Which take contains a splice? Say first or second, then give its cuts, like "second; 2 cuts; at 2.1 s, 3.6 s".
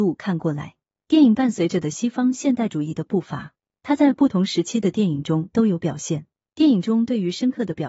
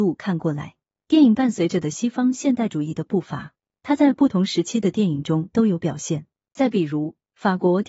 second; 1 cut; at 6.4 s